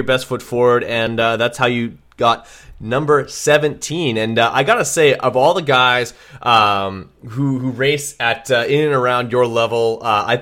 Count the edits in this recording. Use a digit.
0